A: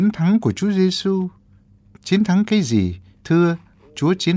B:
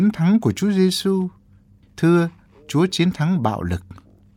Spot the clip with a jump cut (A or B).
B